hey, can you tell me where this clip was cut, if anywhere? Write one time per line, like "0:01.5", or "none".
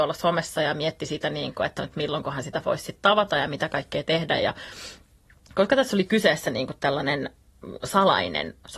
none